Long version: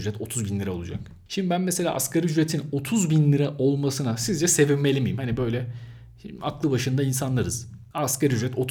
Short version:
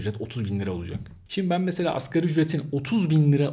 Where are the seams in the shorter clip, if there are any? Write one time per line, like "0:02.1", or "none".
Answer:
none